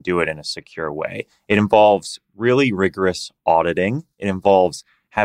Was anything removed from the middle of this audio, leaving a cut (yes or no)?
no